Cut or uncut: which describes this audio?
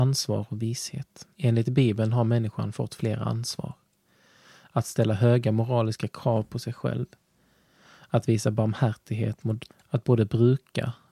cut